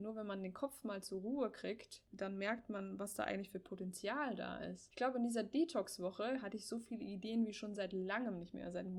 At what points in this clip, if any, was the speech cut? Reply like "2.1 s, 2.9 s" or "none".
none